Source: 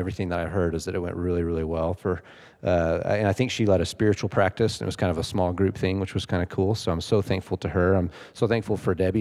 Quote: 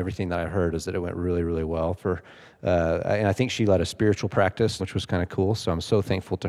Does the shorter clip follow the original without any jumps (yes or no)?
no